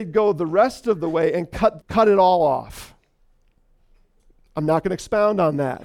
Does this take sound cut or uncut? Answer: cut